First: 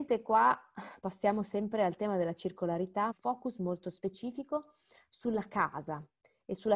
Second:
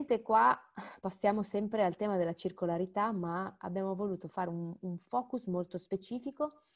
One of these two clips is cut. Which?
first; 1 cut; at 3.1 s

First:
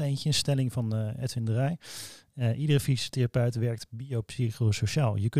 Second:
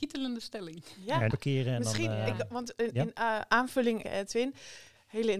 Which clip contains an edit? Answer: second; 2 cuts; at 1.3 s, 4.0 s

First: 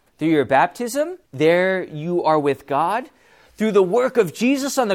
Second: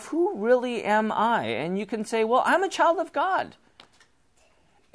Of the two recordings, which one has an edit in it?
first; 1 cut; at 1.2 s

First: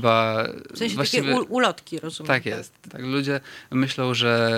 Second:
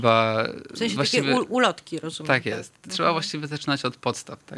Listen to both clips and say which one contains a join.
first; 1 cut; at 2.9 s

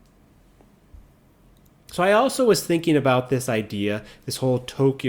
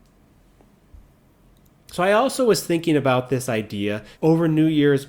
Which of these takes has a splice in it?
second; 1 cut; at 4.2 s

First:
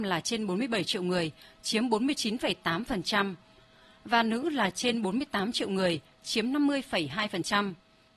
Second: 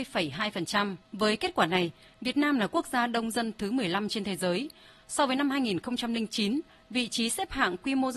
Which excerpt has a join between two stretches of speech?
second; 1 cut; at 1.0 s

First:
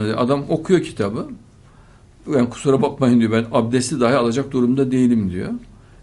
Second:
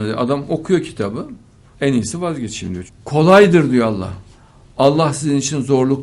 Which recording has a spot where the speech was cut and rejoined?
second; 2 cuts; at 1.7 s, 2.9 s

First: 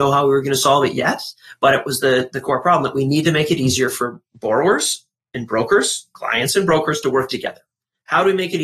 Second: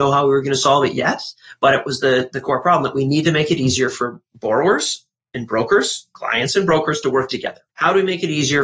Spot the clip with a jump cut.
second; 1 cut; at 7.7 s

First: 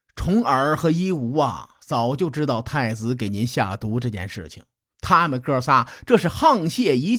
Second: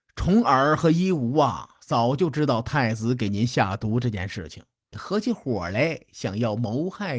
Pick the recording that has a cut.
second; 1 cut; at 4.9 s

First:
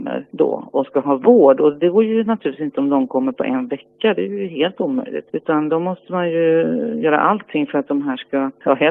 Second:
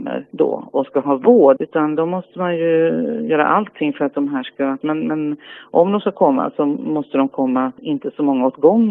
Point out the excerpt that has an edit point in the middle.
second; 2 cuts; at 1.6 s, 4.8 s

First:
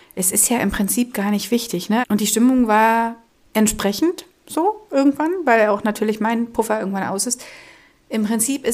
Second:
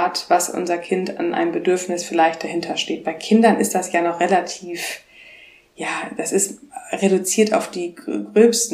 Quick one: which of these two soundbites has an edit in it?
first; 1 cut; at 2.0 s

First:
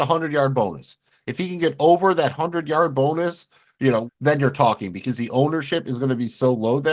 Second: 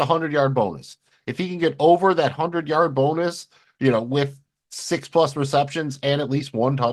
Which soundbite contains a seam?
first; 1 cut; at 4.1 s

